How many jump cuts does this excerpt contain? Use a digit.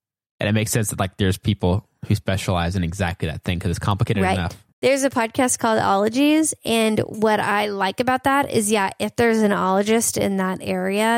1